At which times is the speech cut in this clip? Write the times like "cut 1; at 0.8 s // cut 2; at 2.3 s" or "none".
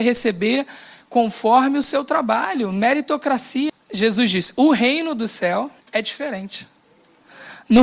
cut 1; at 3.7 s // cut 2; at 5.8 s